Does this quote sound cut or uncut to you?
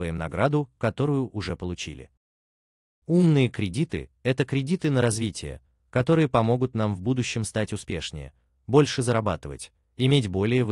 uncut